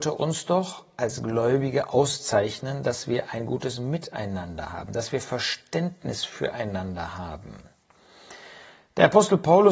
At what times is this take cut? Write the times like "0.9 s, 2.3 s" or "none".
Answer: none